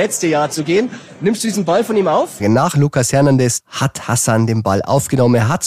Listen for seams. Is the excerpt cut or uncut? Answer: cut